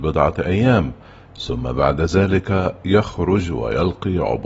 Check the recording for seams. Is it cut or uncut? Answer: uncut